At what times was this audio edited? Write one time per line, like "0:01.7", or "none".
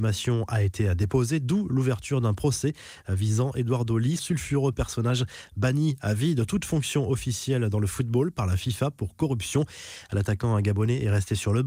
0:04.2
0:10.1